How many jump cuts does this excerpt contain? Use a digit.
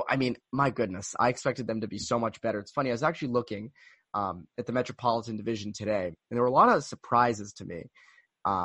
0